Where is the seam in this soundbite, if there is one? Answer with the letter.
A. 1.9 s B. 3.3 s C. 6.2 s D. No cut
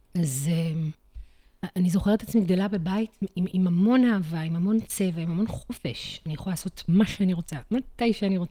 D